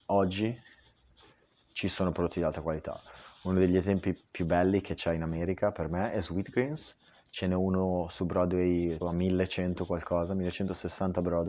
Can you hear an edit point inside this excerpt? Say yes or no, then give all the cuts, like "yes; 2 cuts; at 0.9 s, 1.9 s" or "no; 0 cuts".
yes; 1 cut; at 9.0 s